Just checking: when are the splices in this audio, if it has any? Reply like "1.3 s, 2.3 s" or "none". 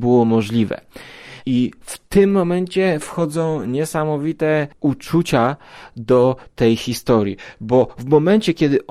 none